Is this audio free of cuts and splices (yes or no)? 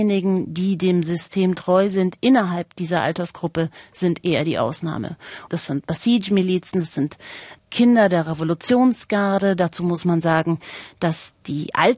yes